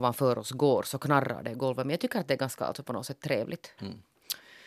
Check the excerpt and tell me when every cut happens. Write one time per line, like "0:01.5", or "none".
0:03.8